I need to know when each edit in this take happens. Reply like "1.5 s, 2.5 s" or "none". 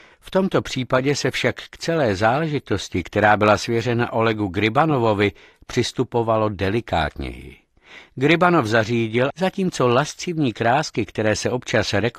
9.3 s